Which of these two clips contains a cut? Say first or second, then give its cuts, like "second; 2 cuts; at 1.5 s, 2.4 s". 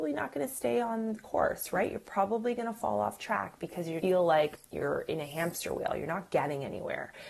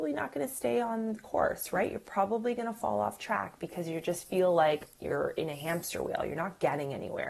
first; 1 cut; at 4.0 s